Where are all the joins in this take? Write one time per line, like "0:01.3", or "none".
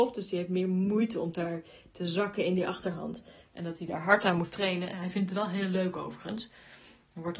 0:03.4
0:04.9